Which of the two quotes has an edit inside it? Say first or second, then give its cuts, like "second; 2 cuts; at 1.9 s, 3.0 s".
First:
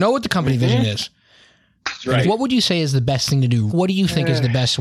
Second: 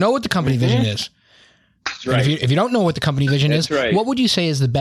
first; 2 cuts; at 2.2 s, 3.7 s